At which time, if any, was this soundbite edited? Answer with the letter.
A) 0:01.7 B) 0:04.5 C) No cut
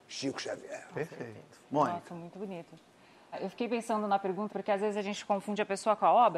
B